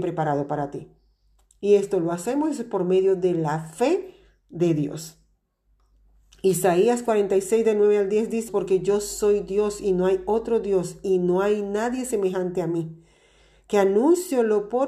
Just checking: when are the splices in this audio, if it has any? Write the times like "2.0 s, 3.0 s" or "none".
8.5 s